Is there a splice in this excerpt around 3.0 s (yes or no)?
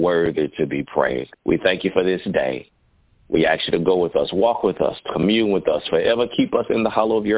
no